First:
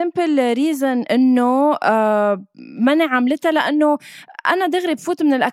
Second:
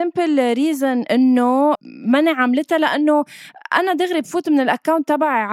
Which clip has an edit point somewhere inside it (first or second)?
second